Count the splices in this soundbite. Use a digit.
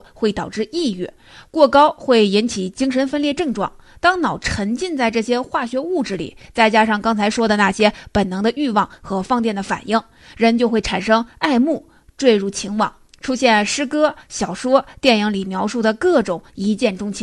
0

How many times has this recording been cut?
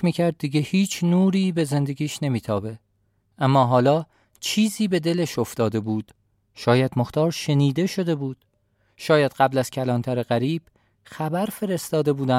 0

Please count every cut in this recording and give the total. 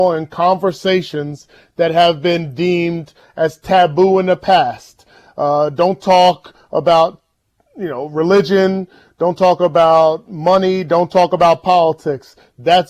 0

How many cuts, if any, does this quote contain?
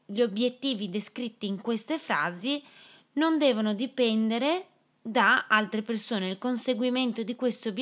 0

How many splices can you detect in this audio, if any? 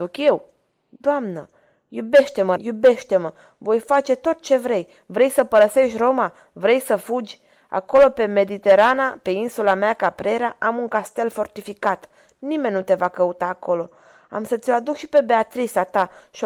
1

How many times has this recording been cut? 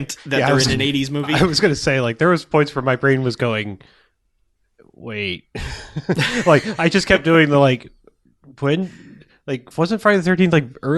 1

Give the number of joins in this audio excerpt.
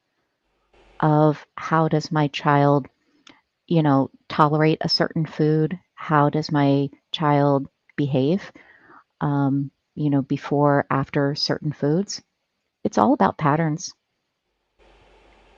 0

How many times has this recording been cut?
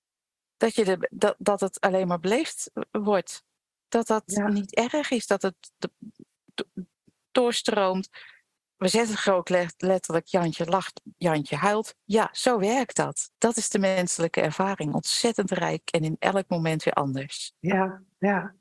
1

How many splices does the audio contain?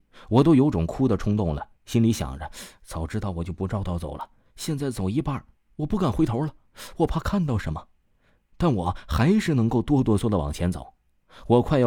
2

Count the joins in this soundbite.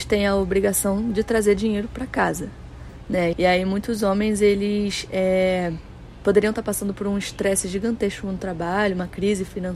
1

